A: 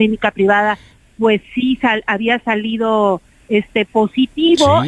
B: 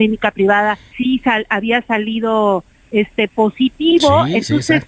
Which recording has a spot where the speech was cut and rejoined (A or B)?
B